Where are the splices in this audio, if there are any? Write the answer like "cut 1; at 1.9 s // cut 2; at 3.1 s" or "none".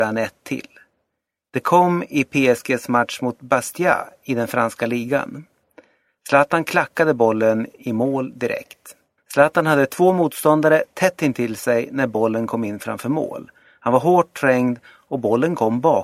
cut 1; at 9.2 s